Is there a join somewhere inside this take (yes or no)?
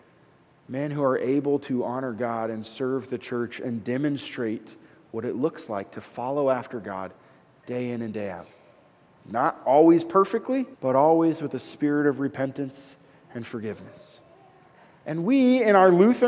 yes